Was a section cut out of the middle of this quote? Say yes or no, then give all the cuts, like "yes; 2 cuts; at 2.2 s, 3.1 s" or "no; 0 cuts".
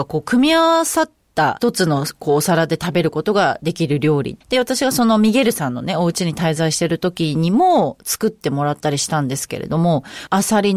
yes; 1 cut; at 4.4 s